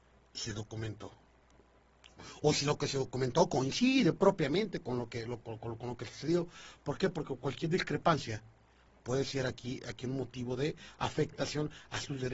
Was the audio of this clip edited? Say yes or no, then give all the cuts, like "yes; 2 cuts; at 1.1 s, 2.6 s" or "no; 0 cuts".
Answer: no; 0 cuts